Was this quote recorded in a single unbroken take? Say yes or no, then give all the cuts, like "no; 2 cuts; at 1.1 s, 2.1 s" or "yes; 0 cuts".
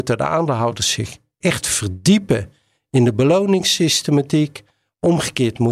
yes; 0 cuts